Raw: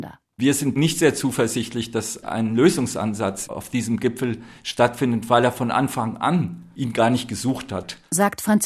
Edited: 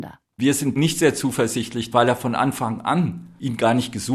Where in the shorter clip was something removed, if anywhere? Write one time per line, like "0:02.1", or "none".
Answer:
0:01.9